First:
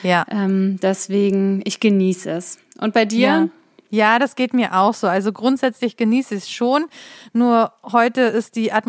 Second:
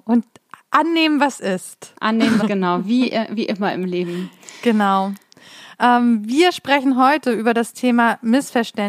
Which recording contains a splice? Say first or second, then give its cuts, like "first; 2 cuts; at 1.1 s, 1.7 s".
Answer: second; 1 cut; at 2.4 s